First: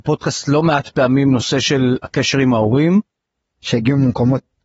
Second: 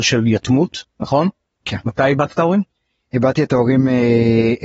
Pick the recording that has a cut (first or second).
first